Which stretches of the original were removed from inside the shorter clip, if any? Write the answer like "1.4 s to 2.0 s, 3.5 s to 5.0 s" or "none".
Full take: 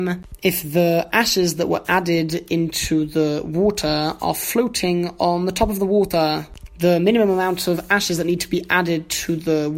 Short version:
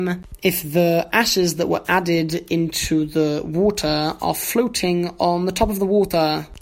none